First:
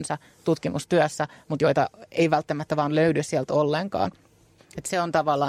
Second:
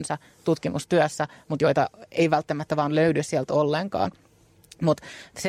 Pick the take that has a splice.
first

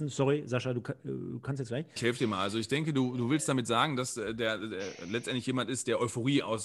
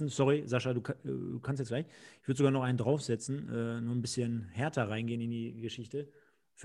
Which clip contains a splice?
first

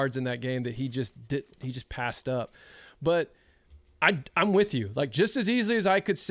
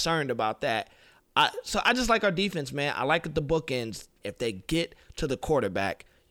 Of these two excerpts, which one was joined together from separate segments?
second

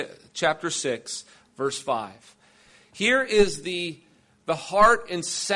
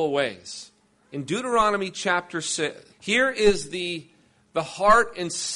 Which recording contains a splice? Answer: second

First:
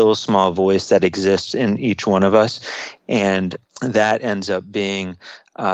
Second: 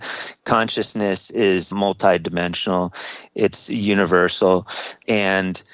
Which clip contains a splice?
second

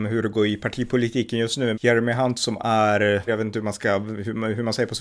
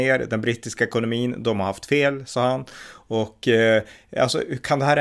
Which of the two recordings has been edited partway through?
first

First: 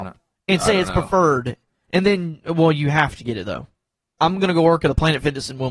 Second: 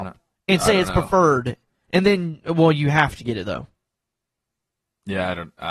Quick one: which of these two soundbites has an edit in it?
first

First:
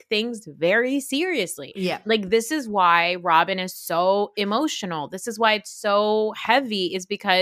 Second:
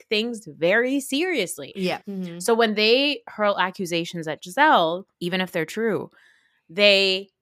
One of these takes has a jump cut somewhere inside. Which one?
second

